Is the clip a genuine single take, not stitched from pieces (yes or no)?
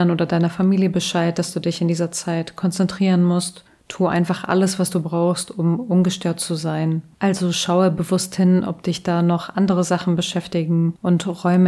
no